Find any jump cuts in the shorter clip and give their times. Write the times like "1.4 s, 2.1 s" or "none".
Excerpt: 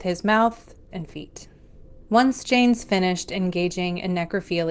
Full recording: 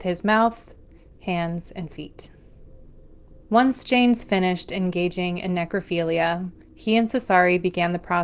0.9 s, 2.0 s